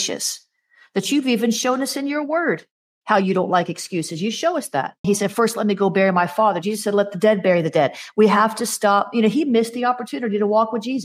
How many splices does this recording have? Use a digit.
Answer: 1